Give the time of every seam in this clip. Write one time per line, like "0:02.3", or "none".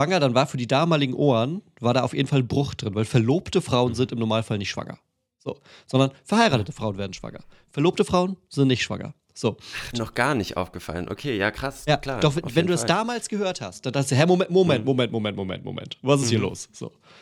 0:09.9